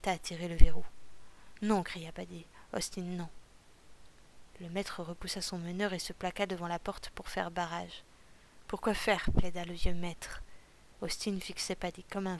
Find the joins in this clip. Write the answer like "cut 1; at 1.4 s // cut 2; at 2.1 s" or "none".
cut 1; at 8.6 s // cut 2; at 11.0 s